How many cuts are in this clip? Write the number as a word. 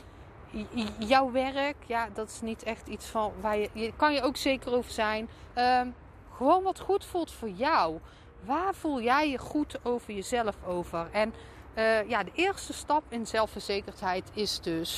one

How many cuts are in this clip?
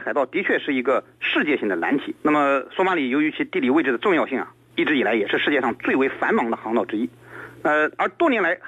two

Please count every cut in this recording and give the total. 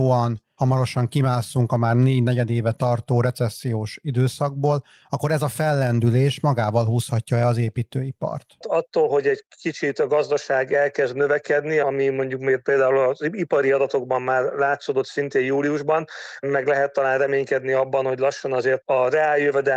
two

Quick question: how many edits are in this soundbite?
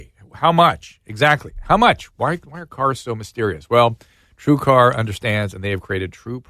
zero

